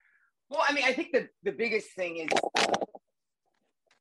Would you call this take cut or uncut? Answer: uncut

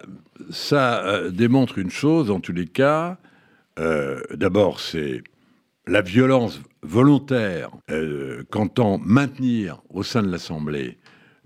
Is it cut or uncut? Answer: cut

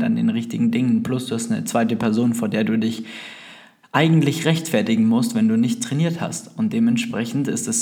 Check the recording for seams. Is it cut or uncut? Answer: uncut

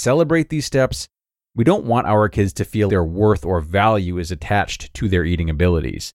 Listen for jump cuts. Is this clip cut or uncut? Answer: cut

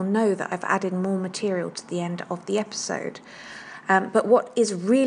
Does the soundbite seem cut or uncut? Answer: uncut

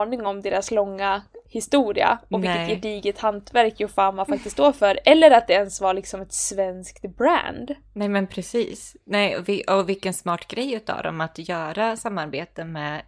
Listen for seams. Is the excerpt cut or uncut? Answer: uncut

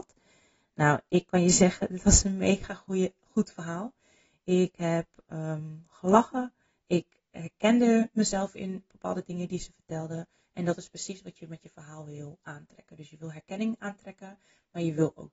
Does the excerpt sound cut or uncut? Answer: uncut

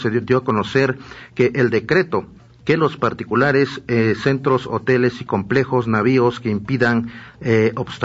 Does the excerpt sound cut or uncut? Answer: uncut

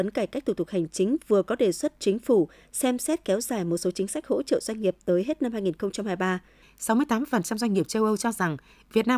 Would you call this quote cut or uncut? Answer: cut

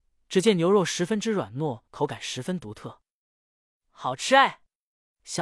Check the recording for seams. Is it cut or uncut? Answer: cut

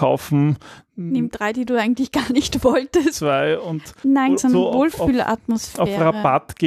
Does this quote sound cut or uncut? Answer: cut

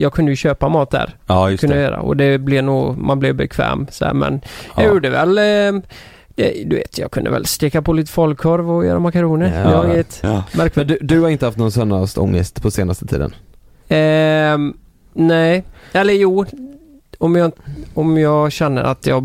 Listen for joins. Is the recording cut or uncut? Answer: uncut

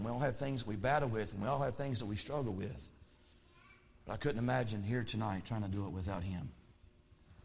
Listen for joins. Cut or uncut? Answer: uncut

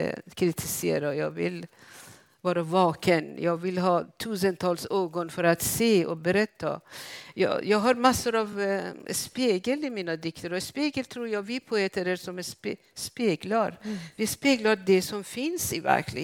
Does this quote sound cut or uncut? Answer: uncut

